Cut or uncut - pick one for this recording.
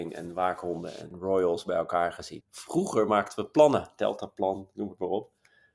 cut